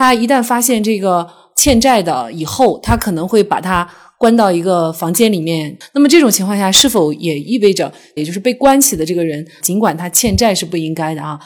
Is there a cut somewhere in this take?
yes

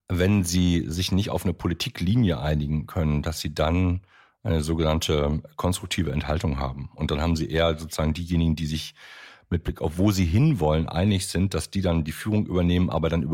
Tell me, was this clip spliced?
no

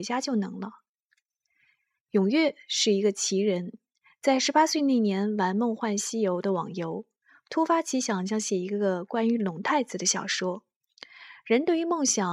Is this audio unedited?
yes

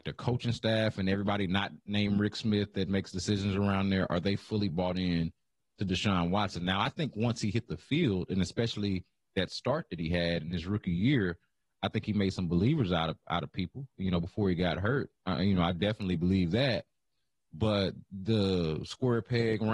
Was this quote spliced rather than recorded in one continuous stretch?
no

